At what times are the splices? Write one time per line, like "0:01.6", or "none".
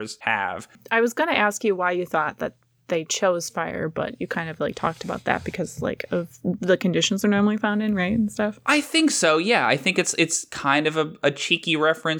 none